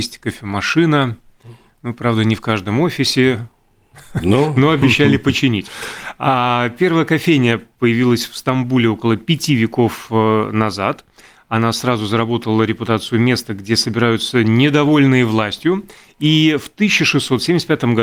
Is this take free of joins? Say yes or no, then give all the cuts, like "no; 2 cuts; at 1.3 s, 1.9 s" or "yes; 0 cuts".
yes; 0 cuts